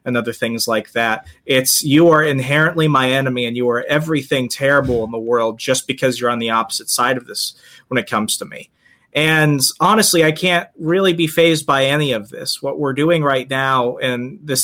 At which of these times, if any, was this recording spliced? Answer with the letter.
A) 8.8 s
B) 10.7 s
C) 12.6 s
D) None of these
D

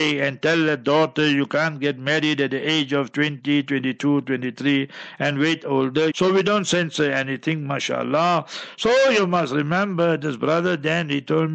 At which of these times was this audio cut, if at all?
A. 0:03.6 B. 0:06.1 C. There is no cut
B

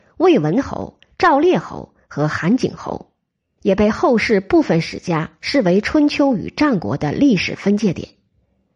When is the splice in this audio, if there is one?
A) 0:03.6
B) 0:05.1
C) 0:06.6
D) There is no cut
A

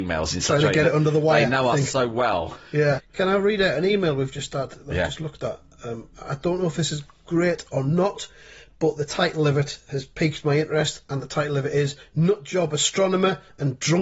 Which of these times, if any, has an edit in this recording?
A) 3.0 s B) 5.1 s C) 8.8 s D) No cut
A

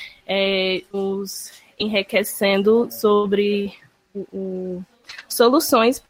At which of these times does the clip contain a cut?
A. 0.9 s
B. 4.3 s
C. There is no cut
A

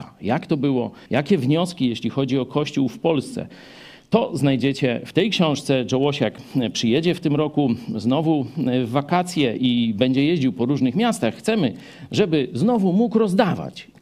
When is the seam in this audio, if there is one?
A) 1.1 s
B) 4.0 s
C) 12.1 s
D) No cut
A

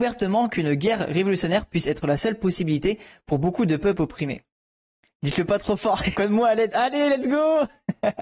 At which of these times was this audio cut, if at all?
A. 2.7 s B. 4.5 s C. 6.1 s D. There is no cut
C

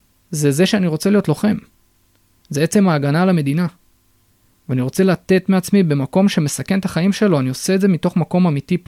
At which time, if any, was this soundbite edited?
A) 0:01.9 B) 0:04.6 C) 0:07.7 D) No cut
D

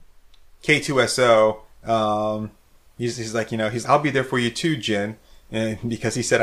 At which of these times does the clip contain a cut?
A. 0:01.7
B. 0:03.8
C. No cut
B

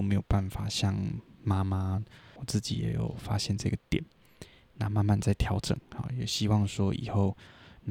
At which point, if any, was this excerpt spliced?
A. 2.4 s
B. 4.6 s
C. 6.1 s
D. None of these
A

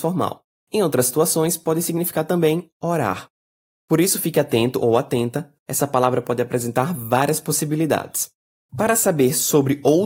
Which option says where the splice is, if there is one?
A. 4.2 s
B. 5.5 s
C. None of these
B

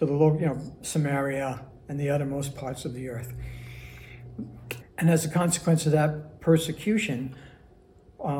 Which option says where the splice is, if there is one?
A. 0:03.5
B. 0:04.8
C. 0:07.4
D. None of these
B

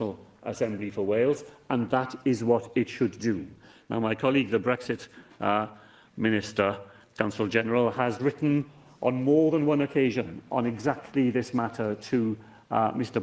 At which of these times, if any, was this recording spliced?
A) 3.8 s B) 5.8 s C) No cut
C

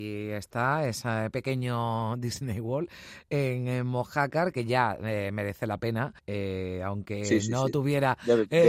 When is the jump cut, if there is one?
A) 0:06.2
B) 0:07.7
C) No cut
A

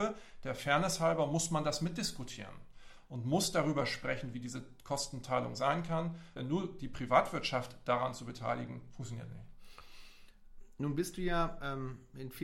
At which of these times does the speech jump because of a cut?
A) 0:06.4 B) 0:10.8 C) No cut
A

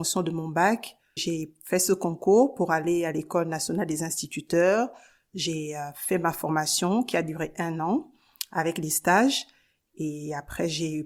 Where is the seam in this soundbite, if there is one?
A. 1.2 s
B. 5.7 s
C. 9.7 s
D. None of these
A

